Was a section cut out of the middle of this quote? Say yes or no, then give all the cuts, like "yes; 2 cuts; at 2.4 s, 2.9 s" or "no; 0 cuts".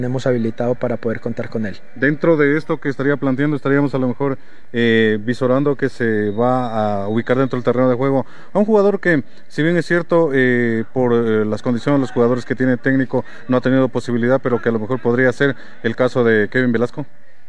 no; 0 cuts